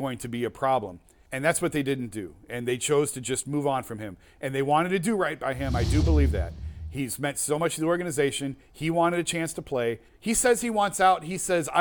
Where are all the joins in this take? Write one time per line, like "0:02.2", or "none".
0:01.3
0:10.1